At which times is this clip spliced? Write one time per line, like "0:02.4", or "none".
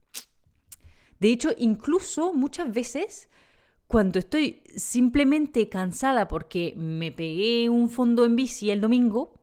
0:01.1